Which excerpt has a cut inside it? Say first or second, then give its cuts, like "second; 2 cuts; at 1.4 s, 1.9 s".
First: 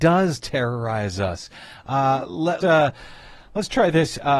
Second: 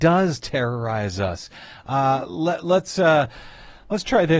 first; 1 cut; at 2.6 s